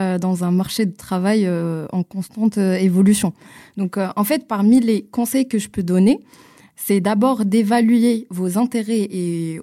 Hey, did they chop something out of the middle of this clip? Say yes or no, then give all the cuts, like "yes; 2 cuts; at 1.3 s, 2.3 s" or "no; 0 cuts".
no; 0 cuts